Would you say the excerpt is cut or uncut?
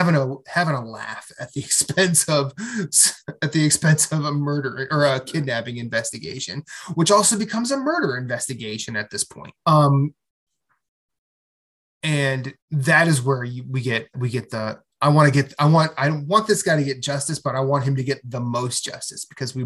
cut